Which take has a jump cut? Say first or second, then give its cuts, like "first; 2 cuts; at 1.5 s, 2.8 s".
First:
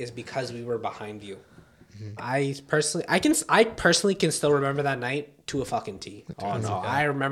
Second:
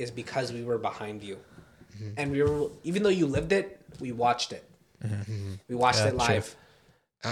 first; 2 cuts; at 2.2 s, 6.3 s